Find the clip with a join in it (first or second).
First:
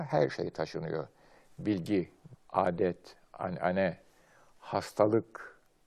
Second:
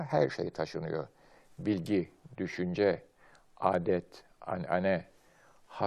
first